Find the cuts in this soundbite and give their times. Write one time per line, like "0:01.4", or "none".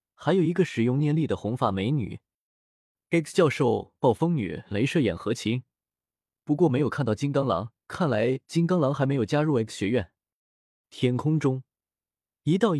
0:07.8
0:10.8

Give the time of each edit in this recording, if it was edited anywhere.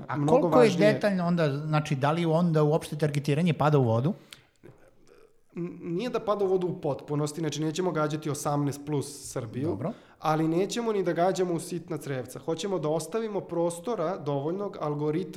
none

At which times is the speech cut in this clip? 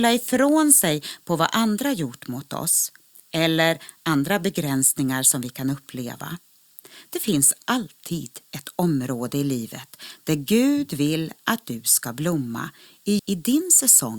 0:13.2

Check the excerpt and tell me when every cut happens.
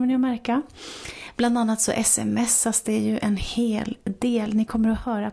none

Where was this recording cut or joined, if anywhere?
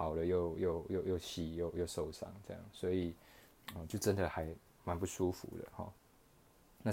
none

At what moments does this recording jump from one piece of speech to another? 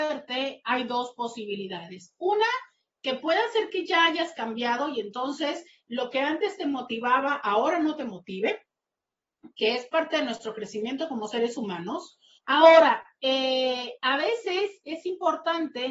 0:12.4

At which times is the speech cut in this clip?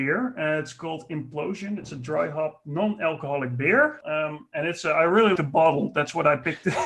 0:04.0
0:05.4

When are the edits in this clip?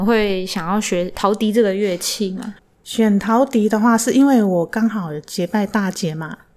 none

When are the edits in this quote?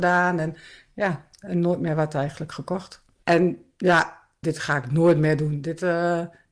0:03.2
0:04.4

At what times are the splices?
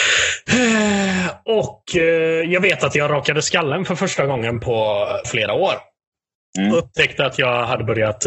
0:05.2

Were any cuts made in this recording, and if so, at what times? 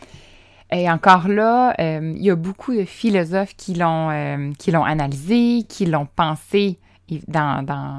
none

